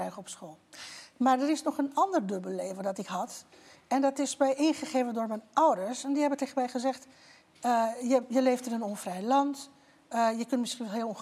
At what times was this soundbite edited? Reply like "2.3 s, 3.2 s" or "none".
none